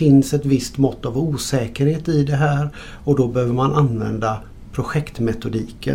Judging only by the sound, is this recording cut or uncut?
uncut